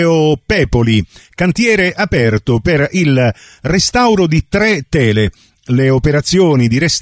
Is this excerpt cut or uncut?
uncut